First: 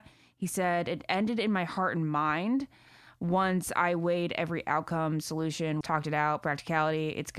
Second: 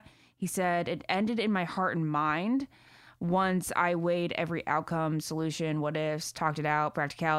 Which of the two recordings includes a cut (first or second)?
first